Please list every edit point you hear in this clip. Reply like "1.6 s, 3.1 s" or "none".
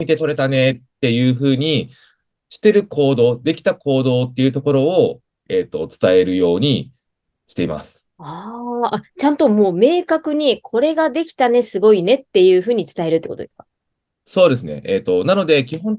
2.3 s